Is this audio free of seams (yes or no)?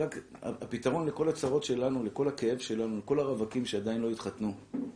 yes